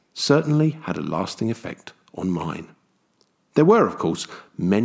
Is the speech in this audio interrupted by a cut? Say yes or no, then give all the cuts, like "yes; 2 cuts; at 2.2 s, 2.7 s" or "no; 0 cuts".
yes; 1 cut; at 3.4 s